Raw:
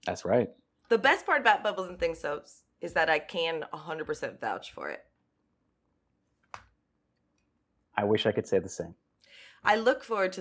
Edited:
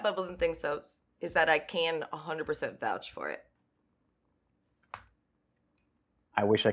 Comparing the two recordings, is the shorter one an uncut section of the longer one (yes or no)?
yes